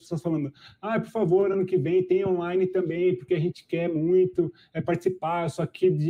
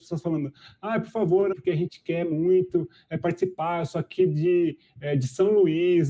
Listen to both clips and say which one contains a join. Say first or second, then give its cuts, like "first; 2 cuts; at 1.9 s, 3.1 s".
second; 1 cut; at 1.5 s